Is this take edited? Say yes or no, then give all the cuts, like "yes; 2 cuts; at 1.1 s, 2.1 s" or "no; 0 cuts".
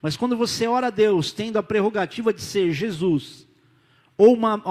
no; 0 cuts